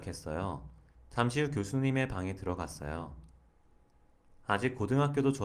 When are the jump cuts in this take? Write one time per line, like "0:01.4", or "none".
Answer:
0:00.9